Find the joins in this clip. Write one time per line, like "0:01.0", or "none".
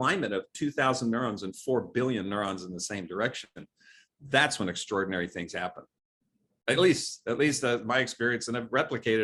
none